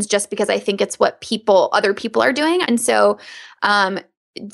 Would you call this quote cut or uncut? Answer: cut